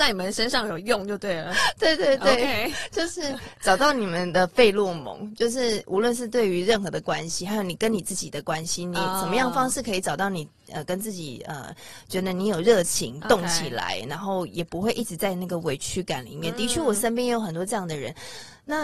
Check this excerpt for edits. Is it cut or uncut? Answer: uncut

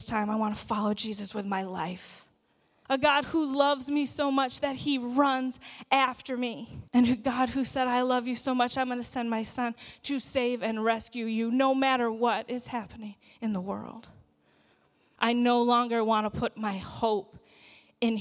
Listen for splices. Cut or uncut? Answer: cut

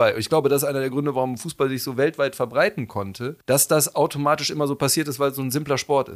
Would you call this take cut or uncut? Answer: cut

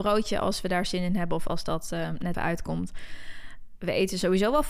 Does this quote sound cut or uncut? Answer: cut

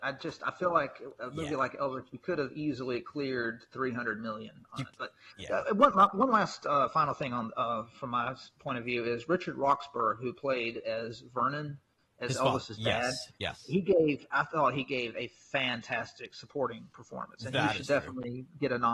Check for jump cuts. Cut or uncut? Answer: uncut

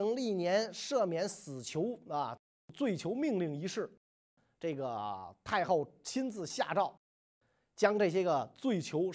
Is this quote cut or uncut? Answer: uncut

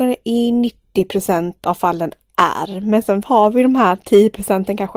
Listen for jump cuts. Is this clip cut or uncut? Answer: uncut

